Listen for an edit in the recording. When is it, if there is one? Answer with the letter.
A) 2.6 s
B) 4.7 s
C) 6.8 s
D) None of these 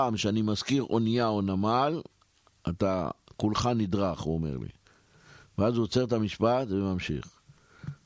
D